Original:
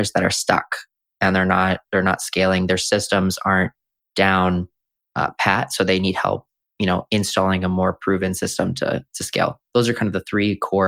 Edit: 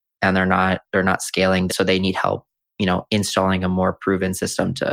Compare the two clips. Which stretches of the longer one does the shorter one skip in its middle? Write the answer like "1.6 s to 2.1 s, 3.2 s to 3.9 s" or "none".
2.7 s to 5.7 s